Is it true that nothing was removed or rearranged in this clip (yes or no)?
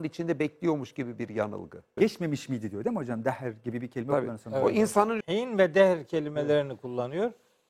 no